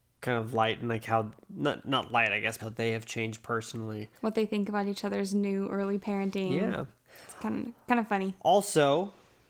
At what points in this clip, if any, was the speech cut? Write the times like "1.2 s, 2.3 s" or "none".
2.6 s, 4.2 s